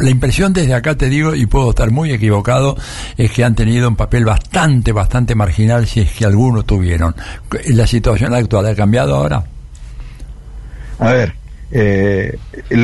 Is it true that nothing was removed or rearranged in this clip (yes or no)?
yes